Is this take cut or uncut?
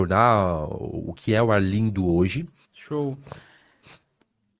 cut